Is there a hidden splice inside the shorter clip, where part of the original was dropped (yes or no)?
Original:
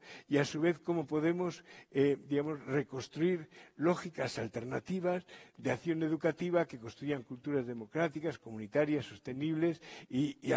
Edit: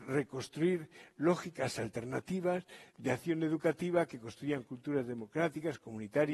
no